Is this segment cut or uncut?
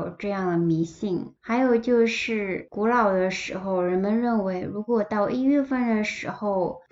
cut